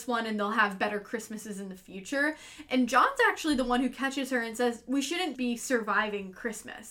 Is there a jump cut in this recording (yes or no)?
yes